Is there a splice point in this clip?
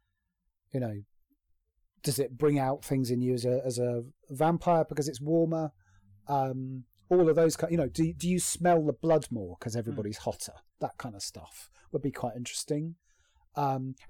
no; 0 cuts

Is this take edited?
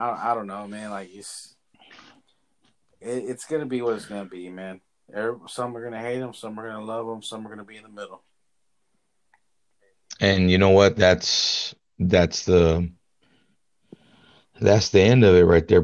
no; 0 cuts

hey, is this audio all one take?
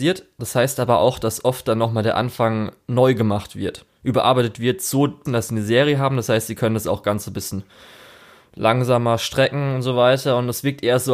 no; 1 cut; at 5.3 s

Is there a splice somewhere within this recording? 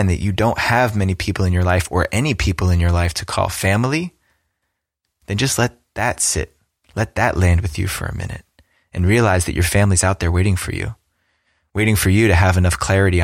no; 0 cuts

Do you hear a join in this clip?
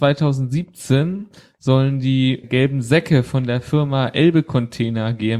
yes; 1 cut; at 2.4 s

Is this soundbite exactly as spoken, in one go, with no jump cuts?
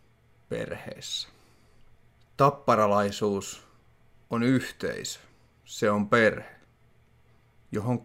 yes; 0 cuts

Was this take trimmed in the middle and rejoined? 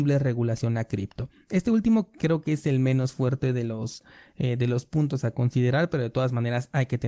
no; 0 cuts

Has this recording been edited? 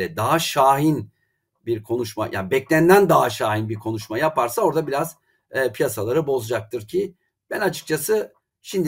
no; 0 cuts

